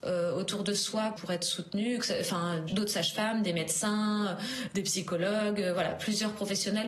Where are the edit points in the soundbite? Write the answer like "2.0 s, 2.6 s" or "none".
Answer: 1.2 s